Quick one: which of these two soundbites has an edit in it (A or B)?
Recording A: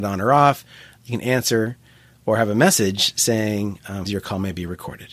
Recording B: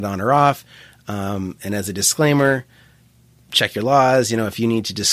A